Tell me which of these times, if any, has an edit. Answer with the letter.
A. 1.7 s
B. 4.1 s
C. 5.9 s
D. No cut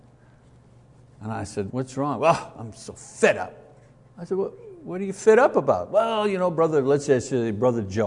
A